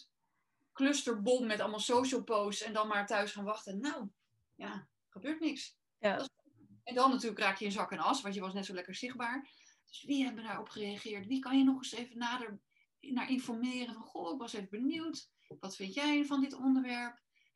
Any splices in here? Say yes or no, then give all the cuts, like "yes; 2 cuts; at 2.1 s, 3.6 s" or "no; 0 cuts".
yes; 1 cut; at 9.8 s